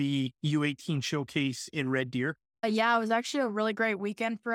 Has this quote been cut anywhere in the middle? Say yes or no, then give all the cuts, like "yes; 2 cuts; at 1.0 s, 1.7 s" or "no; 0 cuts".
yes; 1 cut; at 2.6 s